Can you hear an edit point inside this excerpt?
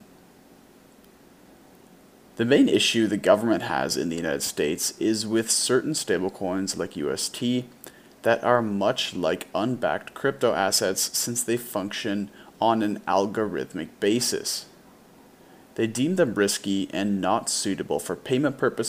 no; 0 cuts

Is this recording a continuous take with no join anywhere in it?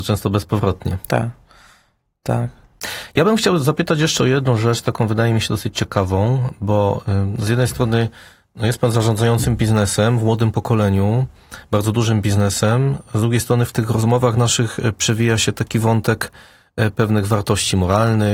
yes; 0 cuts

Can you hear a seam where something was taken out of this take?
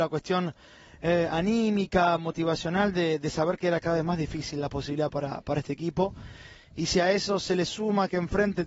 no; 0 cuts

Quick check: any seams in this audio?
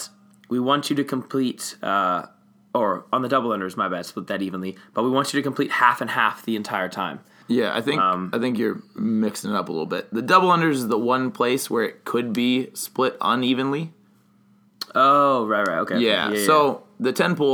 yes; 1 cut; at 7.4 s

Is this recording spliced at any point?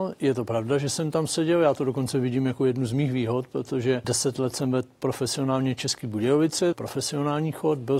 yes; 2 cuts; at 4.0 s, 6.7 s

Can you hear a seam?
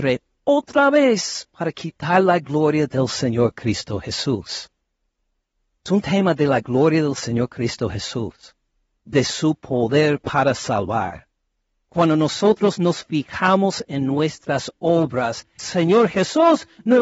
yes; 1 cut; at 15.6 s

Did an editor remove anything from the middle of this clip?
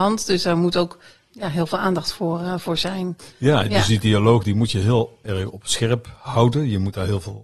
yes; 1 cut; at 1.3 s

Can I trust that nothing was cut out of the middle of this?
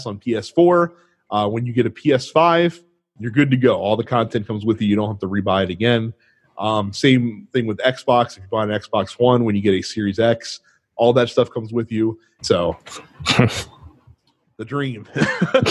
no; 1 cut; at 12.4 s

